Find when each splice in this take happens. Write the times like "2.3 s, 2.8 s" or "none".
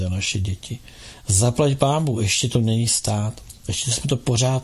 none